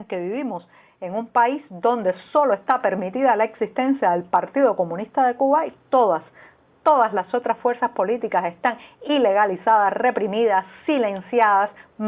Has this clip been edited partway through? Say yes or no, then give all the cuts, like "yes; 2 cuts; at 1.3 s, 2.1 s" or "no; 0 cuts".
no; 0 cuts